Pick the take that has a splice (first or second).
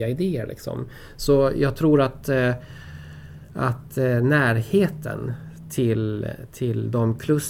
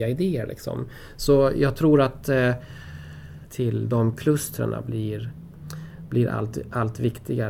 second